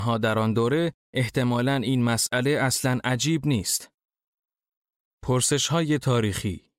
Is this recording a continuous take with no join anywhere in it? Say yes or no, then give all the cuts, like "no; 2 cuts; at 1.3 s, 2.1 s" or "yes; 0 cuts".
yes; 0 cuts